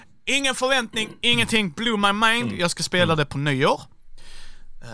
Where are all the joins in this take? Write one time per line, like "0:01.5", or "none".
none